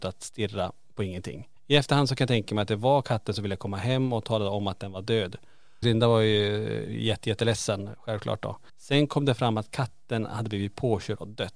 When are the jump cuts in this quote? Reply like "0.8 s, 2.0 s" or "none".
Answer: 1.6 s, 5.8 s, 8.7 s